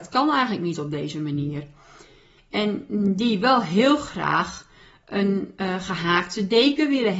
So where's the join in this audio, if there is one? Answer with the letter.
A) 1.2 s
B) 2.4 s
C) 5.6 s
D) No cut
B